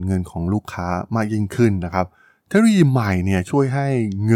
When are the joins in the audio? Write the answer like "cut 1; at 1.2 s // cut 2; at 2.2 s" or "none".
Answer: none